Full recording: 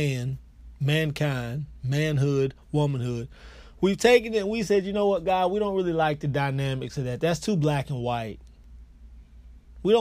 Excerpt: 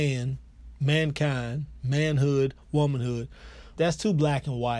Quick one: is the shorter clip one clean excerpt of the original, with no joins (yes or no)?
no